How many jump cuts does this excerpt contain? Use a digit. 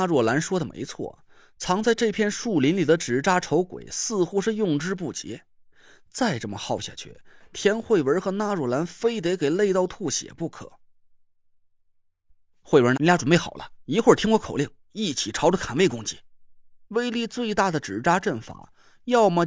2